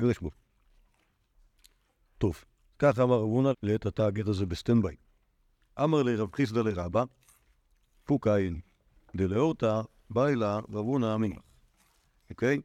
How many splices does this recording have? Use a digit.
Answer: 1